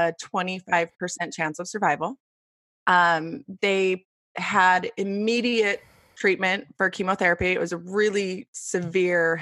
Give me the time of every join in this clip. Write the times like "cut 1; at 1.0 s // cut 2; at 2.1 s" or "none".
none